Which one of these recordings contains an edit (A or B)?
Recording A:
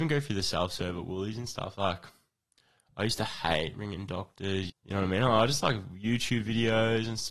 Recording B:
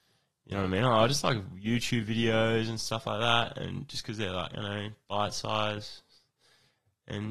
A